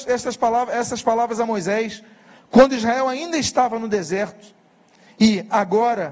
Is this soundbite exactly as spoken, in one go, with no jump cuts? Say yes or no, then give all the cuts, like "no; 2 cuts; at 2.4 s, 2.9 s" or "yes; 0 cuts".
yes; 0 cuts